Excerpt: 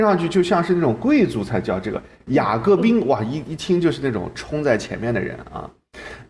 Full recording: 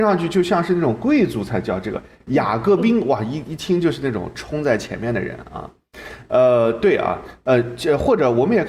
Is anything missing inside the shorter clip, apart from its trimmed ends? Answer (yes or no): no